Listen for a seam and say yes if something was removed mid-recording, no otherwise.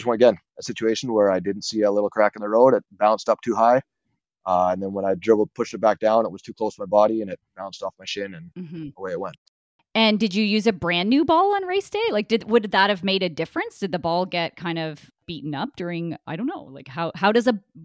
no